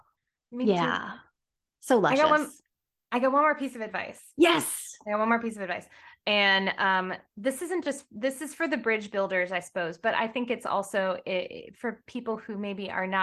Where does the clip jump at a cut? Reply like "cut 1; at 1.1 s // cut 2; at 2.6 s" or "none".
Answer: none

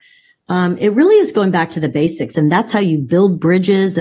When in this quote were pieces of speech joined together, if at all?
cut 1; at 2.3 s

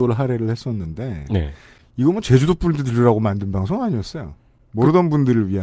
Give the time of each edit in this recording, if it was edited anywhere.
none

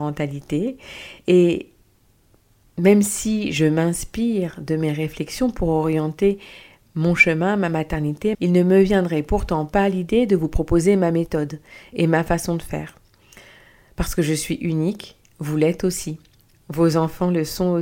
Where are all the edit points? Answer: cut 1; at 8.3 s

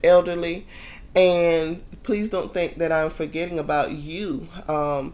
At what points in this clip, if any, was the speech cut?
none

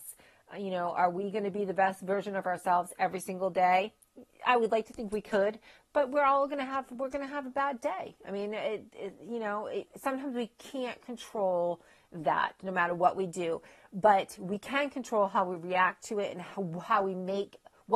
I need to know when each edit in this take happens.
none

